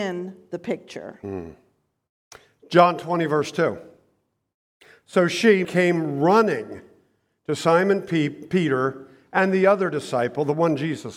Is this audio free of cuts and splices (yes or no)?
no